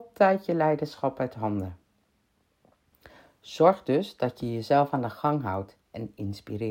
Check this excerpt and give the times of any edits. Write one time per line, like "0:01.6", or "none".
none

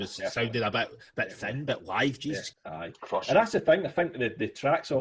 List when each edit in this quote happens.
0:02.5

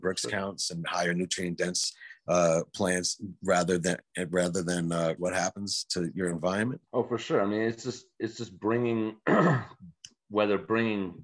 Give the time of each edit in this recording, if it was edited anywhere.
0:05.2
0:06.9

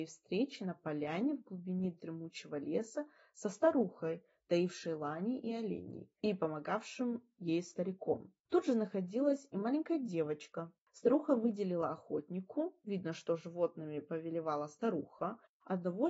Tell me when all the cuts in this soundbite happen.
none

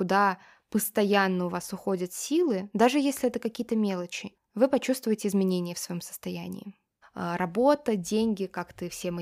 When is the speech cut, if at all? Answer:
0:04.3
0:07.0

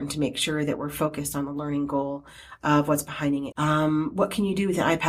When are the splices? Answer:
0:03.5

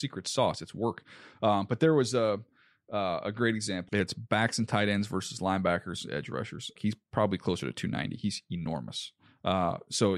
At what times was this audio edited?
0:03.9
0:06.8

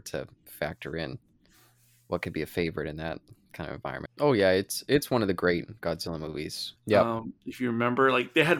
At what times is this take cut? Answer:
0:04.1
0:06.8

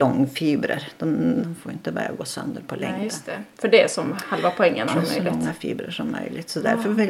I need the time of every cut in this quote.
0:01.4
0:04.9

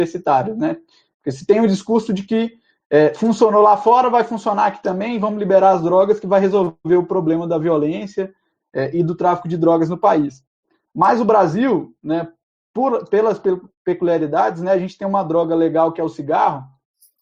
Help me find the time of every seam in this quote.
none

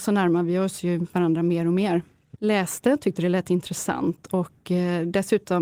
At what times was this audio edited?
0:02.4

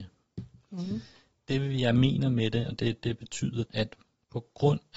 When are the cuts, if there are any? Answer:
0:03.7

